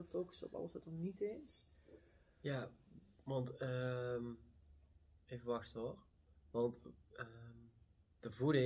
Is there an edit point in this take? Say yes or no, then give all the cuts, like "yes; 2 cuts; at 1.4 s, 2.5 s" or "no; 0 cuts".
no; 0 cuts